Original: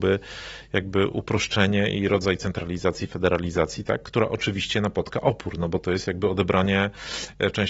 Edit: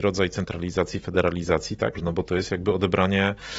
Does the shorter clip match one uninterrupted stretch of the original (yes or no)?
no